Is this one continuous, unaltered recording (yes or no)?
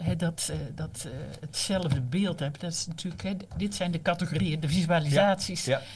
yes